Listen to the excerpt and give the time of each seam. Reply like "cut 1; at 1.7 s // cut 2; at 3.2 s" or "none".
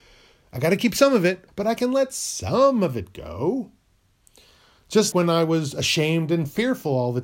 cut 1; at 1.5 s // cut 2; at 5.1 s